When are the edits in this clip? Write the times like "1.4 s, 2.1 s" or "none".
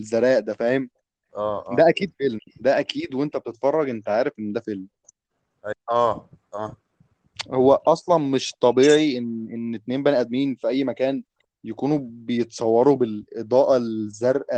5.7 s